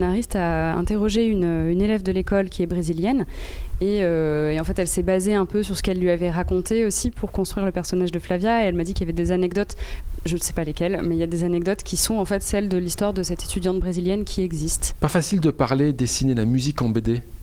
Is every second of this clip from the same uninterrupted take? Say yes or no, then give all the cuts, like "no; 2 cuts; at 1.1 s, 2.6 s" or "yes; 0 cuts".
yes; 0 cuts